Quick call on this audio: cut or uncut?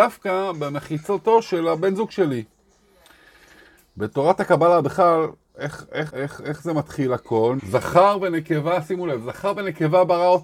cut